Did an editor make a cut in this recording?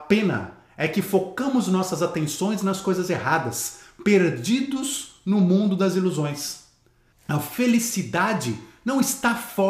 yes; 1 cut; at 7.1 s

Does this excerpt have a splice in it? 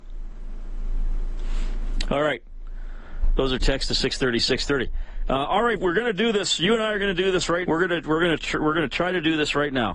yes; 2 cuts; at 5.8 s, 7.6 s

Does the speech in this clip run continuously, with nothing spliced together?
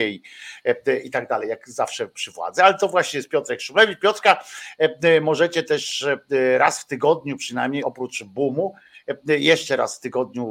yes; 0 cuts

